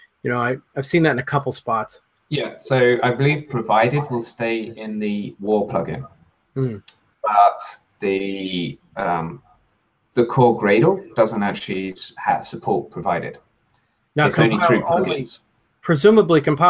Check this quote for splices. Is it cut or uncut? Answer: uncut